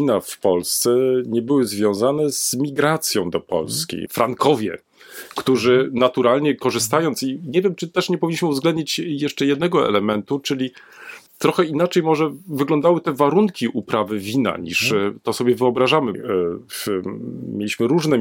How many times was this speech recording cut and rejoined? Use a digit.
2